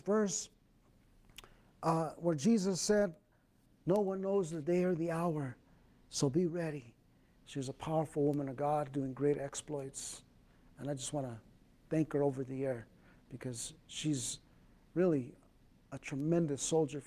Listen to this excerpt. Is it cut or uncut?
cut